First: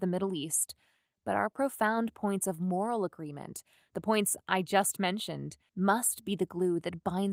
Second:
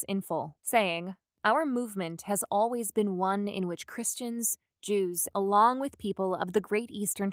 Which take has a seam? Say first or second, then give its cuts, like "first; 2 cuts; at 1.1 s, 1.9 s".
second; 1 cut; at 5.3 s